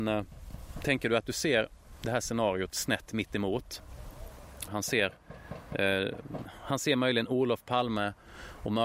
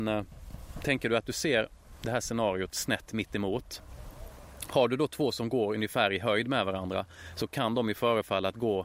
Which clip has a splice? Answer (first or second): first